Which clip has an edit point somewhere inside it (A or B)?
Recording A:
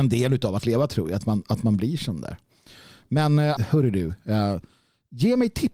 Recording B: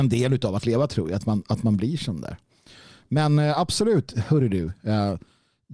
A